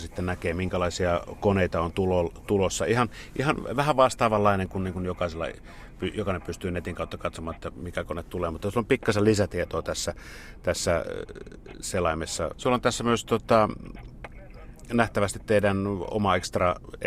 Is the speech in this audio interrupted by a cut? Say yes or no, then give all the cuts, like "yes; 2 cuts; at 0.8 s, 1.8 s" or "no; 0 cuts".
yes; 1 cut; at 12.5 s